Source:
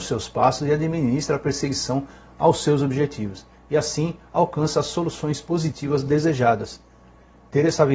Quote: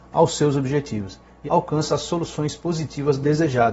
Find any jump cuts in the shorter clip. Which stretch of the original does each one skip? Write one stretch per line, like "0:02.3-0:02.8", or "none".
0:03.7-0:04.3